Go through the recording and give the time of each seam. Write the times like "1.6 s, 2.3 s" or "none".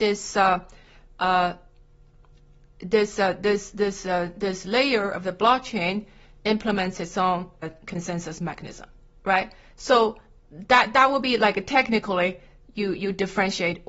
none